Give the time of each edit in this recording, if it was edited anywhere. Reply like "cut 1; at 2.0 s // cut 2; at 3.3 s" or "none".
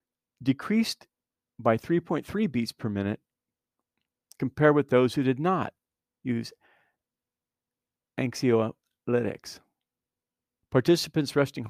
cut 1; at 10.6 s